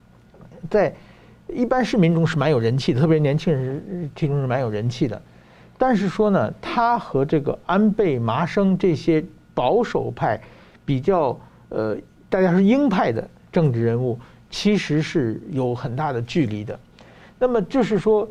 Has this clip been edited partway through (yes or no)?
no